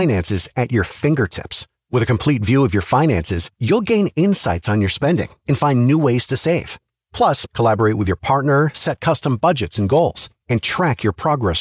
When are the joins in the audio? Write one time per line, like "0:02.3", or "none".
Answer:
0:07.4